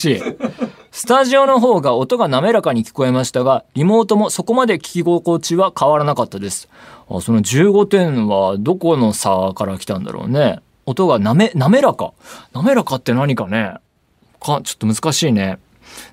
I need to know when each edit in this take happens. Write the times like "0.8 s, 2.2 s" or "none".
none